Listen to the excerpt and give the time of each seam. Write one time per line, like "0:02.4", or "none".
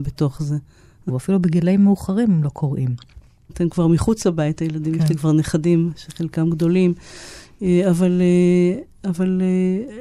0:01.1
0:03.5